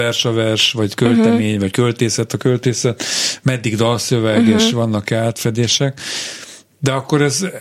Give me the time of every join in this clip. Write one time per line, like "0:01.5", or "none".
none